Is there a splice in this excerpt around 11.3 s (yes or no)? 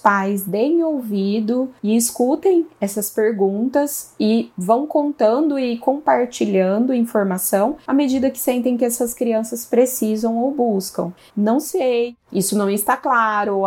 yes